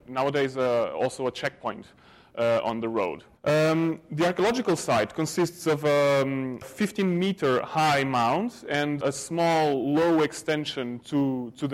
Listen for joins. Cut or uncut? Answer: cut